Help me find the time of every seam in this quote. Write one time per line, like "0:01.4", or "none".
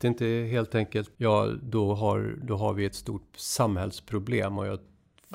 0:01.2

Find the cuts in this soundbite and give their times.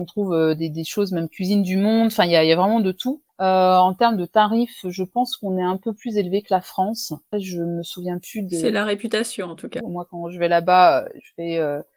0:03.3
0:07.3
0:09.8

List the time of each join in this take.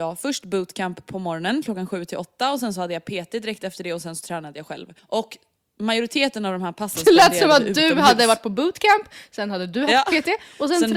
0:05.0

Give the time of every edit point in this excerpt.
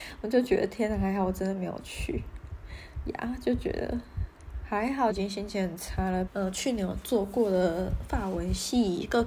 0:05.1
0:06.3

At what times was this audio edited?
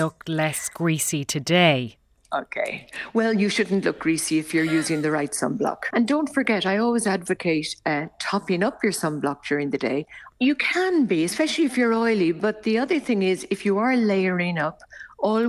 0:05.9
0:10.3

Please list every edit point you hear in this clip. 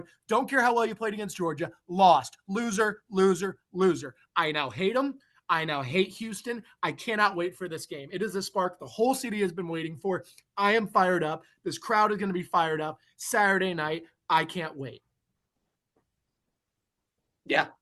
none

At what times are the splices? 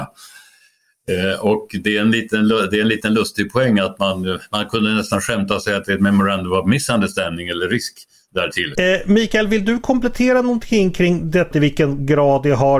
0:08.8
0:11.5

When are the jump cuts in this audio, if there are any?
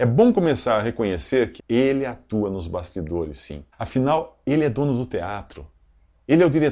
0:01.6
0:03.7

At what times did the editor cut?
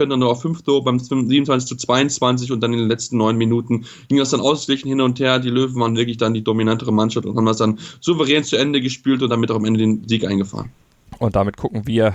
none

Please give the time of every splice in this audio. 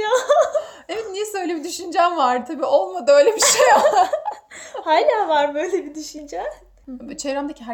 0:06.8

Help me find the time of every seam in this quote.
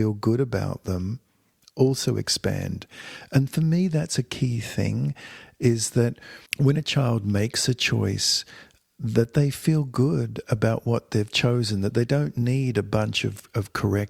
0:06.5

